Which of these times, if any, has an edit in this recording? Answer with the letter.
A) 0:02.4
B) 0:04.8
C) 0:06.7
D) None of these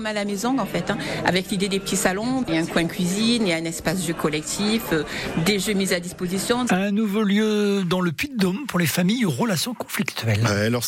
C